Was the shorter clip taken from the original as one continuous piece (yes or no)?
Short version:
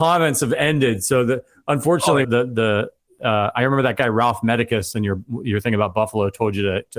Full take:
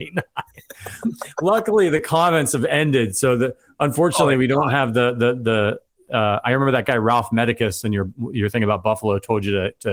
no